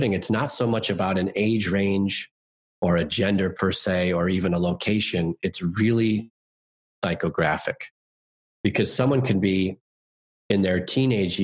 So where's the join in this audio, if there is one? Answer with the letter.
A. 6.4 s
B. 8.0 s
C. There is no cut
C